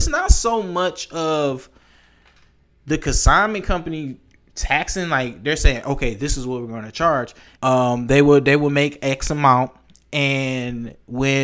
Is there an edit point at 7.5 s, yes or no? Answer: yes